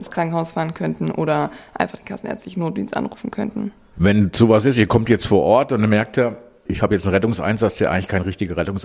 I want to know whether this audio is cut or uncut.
uncut